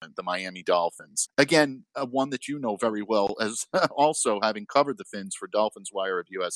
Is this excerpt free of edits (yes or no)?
no